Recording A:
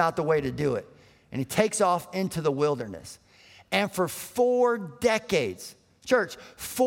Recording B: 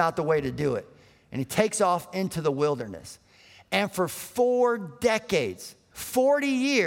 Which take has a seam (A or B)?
B